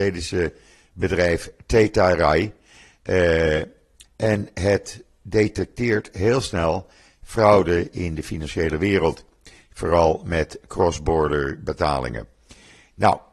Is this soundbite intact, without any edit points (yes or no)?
no